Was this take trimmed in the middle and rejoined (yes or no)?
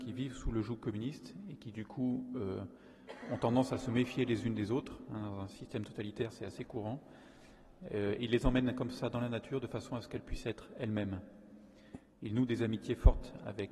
no